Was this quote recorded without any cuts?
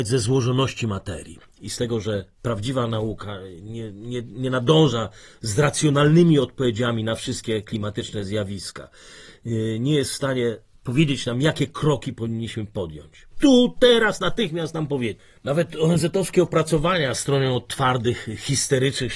no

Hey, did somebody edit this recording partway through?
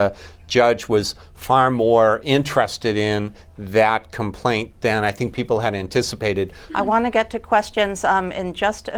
yes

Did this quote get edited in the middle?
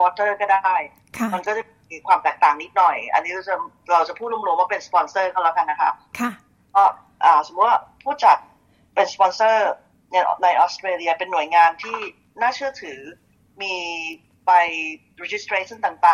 no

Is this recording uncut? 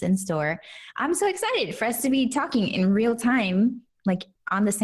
yes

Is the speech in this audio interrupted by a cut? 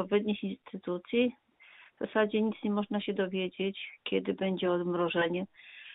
no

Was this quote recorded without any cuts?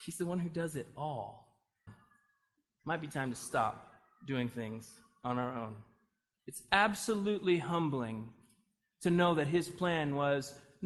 no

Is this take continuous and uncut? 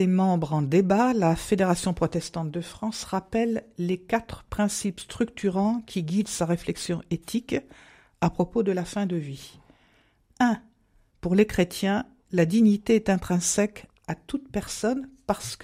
no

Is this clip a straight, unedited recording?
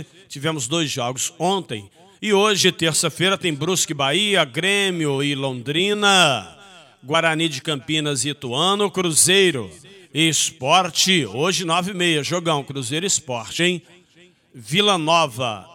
yes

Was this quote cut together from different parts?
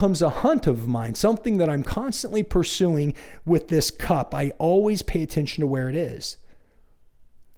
no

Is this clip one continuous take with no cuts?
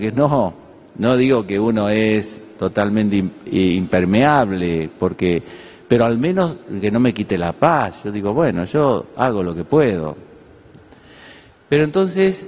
yes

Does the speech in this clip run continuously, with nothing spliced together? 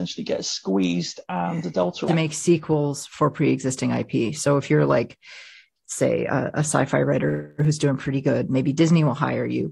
no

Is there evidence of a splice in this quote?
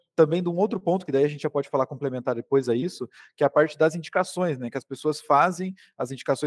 no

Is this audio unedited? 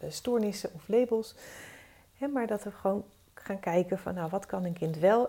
yes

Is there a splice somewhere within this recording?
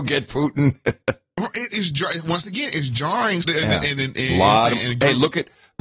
yes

